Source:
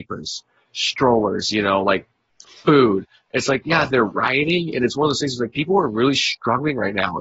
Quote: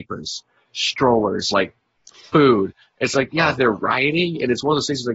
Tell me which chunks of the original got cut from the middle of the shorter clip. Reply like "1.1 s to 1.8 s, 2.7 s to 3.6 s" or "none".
1.5 s to 1.8 s